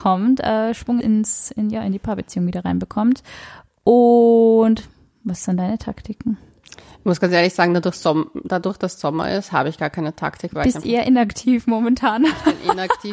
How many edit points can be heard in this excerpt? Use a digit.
1